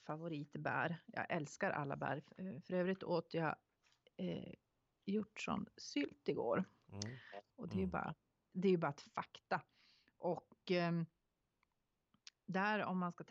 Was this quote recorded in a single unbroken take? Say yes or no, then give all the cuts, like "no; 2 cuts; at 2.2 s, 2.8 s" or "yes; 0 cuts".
no; 1 cut; at 7.5 s